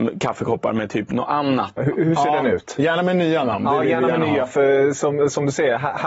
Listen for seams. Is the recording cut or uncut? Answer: cut